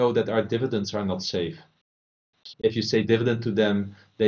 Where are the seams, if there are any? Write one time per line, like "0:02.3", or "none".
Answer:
0:02.5